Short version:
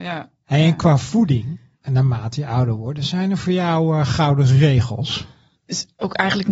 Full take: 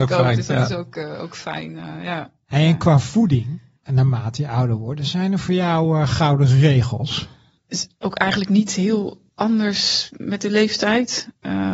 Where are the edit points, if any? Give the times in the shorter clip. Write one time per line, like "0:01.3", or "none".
none

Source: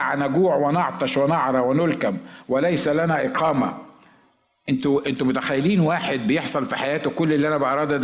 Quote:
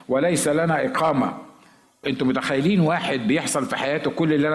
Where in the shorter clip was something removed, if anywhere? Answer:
0:02.0

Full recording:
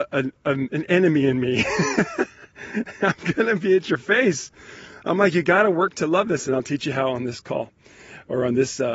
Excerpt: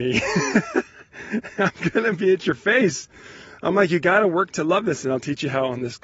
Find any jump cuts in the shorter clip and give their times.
none

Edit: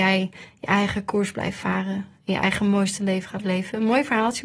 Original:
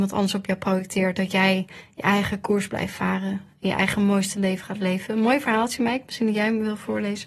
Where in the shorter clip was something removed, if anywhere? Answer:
none

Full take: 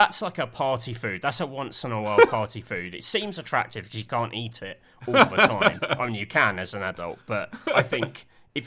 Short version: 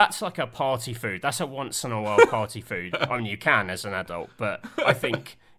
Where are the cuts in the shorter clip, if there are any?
0:02.9

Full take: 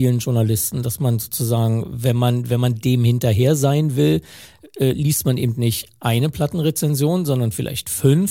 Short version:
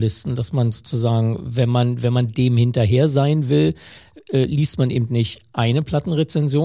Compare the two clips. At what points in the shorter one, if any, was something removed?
none

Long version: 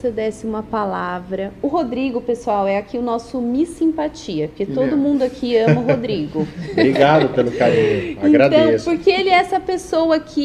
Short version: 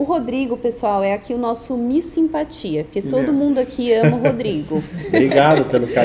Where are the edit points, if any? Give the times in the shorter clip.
none

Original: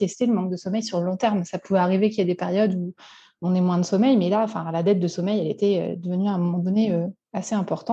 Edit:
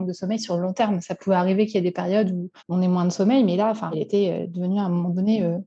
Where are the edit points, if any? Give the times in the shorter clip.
0:02.6
0:03.9

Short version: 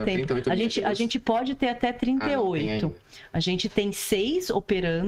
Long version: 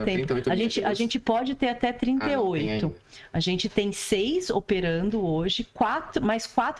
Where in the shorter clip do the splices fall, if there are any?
none

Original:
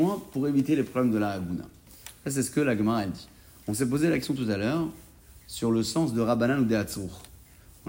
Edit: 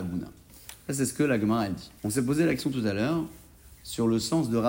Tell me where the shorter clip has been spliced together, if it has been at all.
0:02.0

